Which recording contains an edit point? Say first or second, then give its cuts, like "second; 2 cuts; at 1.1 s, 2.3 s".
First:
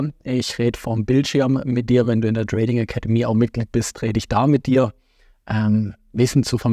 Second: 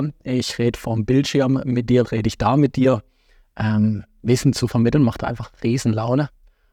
second; 1 cut; at 2.0 s